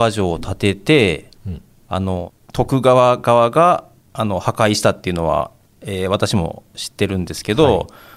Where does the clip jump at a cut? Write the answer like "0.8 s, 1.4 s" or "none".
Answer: none